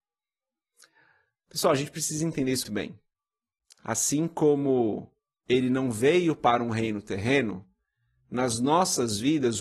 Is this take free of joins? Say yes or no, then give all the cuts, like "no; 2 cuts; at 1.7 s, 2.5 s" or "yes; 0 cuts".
no; 1 cut; at 2.6 s